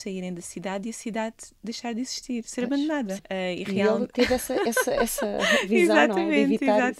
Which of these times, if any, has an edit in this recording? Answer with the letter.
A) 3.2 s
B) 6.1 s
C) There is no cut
A